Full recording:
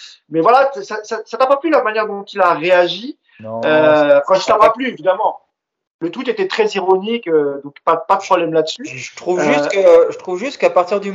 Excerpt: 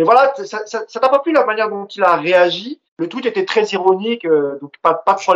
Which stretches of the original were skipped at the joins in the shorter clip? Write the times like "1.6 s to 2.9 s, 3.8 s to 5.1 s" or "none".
3.2 s to 5.9 s